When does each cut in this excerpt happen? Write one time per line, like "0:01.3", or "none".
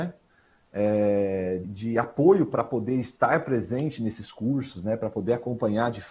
0:01.6